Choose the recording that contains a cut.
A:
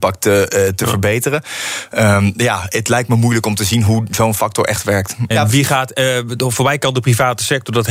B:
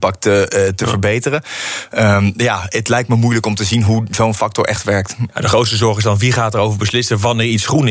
A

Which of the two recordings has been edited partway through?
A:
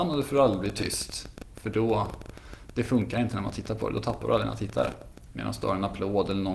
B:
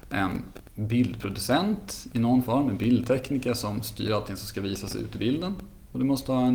A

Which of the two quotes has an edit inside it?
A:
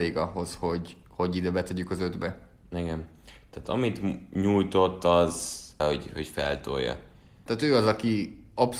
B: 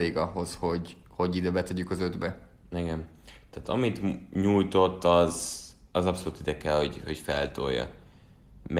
A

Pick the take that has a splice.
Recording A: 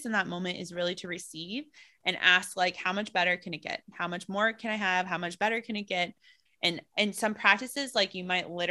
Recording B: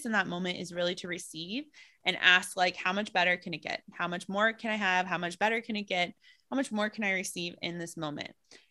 A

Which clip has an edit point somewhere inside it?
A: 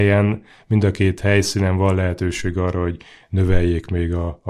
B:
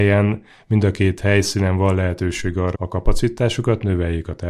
B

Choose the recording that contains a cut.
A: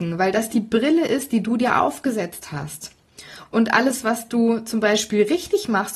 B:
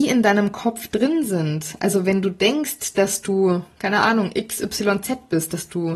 A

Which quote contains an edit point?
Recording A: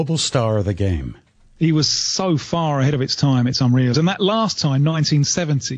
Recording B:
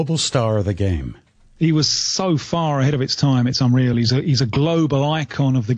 A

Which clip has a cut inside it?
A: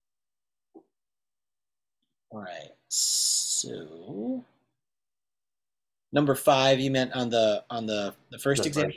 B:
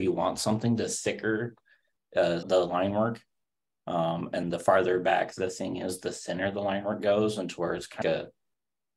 B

